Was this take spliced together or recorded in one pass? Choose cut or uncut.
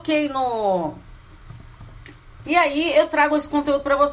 cut